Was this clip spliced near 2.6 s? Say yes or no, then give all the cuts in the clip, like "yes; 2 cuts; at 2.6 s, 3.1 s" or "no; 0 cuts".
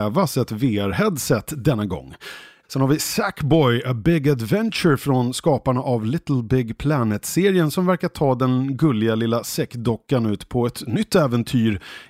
yes; 1 cut; at 2.6 s